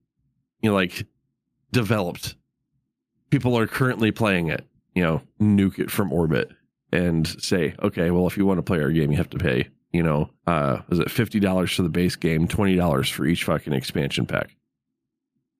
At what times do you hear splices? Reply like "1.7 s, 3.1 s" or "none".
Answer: 4.8 s, 10.4 s